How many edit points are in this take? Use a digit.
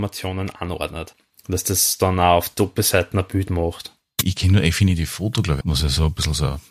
1